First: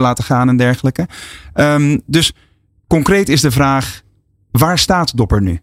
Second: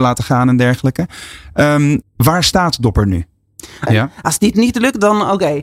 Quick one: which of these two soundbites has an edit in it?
second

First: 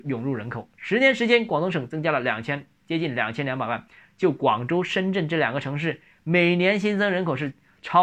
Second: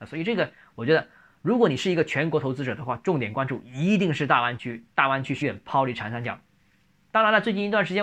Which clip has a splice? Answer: second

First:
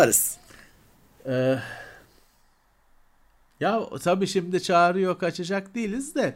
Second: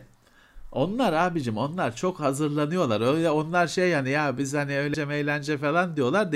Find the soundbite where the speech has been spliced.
second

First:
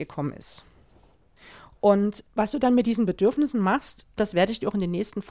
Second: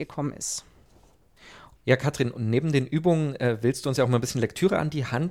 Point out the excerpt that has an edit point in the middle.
second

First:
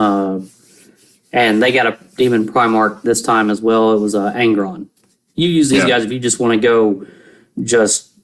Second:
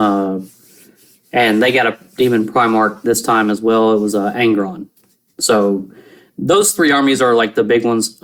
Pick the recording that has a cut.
first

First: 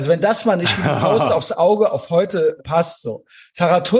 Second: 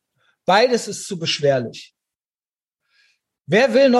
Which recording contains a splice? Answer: first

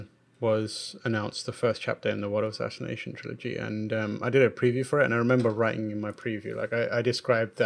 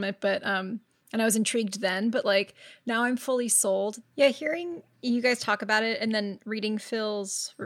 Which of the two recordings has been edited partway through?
second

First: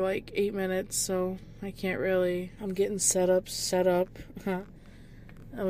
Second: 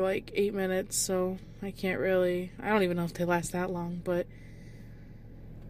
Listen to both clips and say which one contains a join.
first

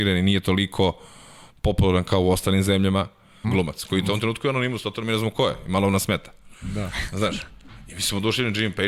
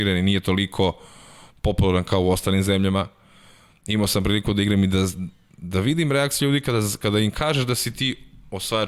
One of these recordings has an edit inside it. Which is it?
first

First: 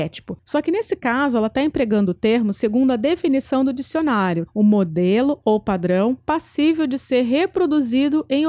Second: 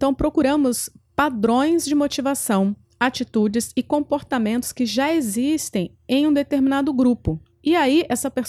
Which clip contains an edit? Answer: first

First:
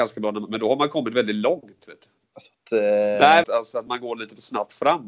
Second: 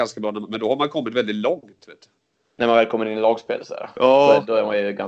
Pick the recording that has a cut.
first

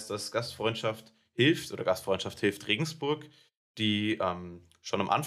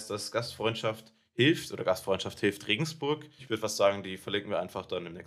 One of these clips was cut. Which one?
second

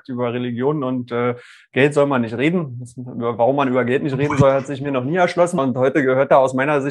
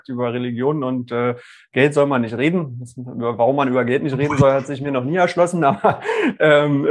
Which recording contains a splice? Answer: first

